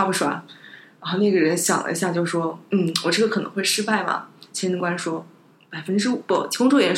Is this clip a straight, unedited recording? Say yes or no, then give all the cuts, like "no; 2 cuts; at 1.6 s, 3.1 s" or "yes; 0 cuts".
yes; 0 cuts